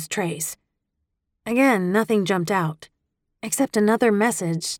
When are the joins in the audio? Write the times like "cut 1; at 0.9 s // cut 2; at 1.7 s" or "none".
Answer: none